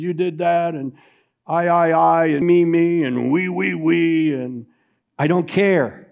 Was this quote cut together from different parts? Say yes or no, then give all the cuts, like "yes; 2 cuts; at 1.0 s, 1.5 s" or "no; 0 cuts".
yes; 1 cut; at 2.4 s